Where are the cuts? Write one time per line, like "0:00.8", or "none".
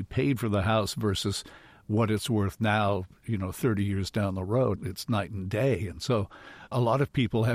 none